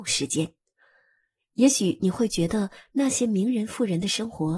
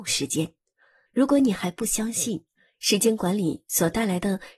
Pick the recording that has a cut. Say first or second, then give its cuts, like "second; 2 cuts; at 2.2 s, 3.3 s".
second; 1 cut; at 1.1 s